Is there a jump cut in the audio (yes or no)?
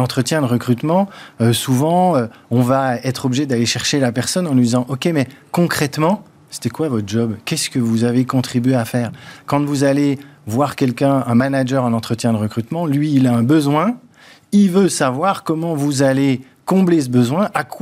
no